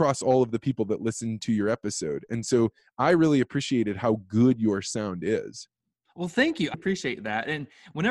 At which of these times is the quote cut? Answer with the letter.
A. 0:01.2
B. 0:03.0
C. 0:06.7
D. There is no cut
C